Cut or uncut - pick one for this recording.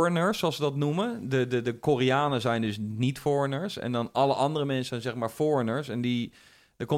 uncut